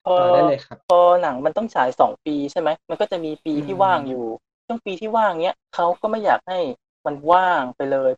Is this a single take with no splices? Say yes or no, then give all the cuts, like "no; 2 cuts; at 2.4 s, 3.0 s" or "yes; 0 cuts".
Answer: yes; 0 cuts